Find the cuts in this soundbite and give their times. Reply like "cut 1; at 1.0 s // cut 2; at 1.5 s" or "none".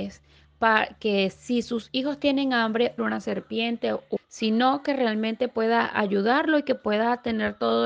cut 1; at 3.0 s // cut 2; at 4.2 s